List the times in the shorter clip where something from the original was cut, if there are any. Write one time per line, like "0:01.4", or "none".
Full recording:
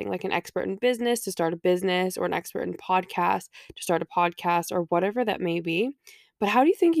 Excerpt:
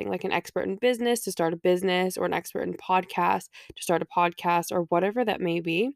none